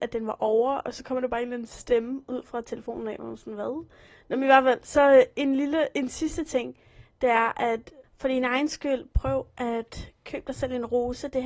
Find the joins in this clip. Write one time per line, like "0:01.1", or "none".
none